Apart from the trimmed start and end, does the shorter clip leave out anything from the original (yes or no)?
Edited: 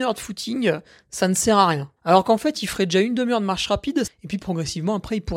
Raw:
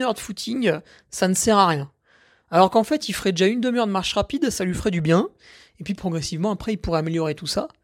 yes